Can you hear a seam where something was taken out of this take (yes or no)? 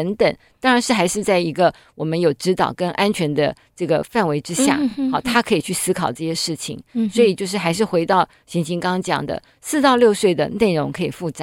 no